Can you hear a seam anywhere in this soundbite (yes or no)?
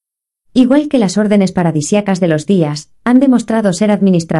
no